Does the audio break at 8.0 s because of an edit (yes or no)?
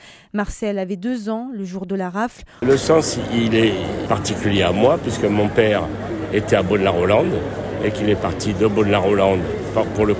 no